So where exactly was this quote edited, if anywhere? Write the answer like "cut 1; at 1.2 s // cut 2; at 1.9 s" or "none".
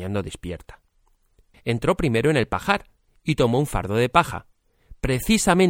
cut 1; at 1.5 s